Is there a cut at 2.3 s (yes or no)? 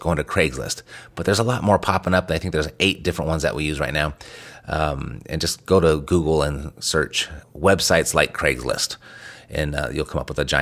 no